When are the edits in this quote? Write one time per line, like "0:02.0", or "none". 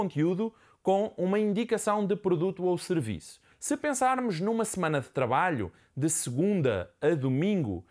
0:03.5